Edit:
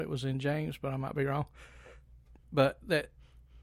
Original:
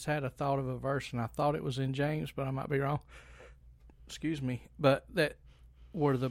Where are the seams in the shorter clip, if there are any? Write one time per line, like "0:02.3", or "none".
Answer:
0:02.4

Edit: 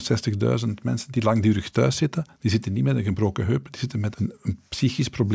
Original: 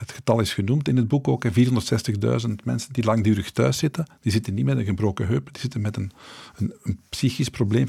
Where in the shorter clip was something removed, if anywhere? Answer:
0:04.1

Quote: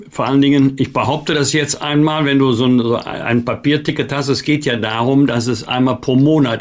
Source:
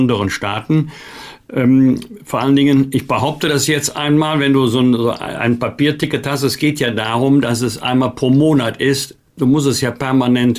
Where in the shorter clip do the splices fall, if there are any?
none

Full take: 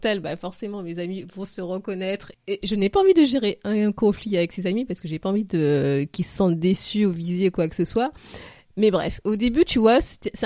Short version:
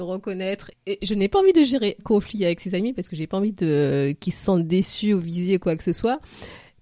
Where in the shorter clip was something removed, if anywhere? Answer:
0:02.0

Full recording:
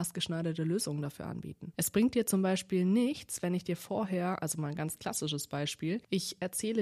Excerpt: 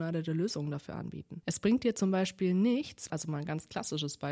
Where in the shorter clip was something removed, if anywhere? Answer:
0:03.1

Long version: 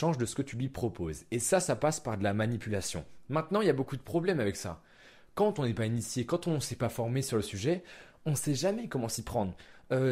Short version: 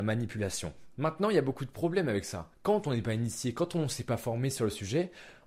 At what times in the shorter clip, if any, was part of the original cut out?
0:02.5

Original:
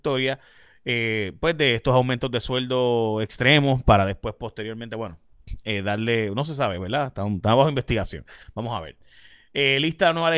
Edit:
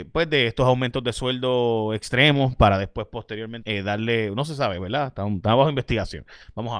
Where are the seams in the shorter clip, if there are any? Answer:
0:03.6

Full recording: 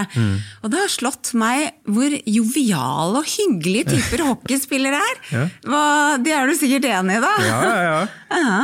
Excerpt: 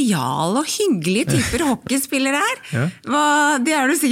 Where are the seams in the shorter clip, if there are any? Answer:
none

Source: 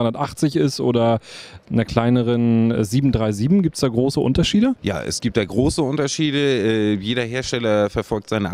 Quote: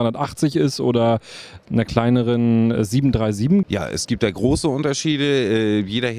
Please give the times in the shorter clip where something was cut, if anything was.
0:03.6

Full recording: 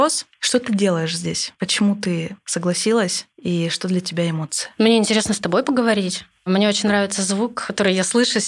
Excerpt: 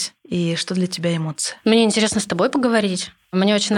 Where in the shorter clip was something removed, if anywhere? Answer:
none

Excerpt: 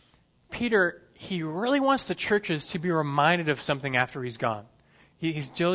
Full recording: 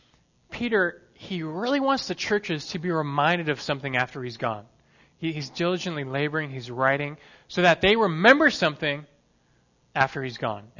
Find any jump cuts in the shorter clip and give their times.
none

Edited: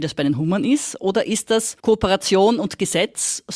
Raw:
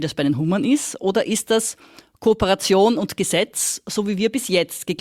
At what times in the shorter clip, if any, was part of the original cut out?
0:01.8

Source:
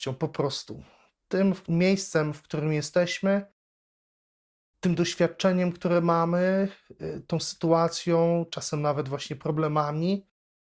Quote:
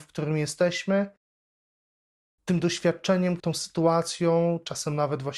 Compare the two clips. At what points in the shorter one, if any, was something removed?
0:03.4

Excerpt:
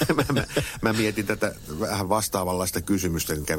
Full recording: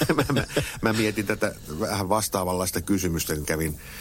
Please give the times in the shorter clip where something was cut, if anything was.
none

